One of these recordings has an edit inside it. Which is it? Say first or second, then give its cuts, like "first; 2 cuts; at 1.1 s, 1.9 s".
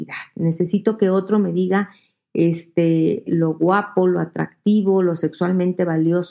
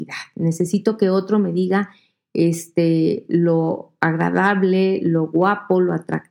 first; 1 cut; at 3.3 s